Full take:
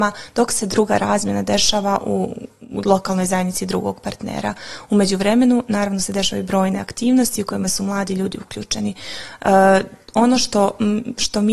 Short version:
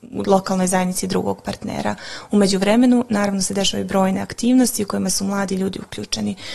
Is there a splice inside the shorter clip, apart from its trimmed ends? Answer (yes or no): no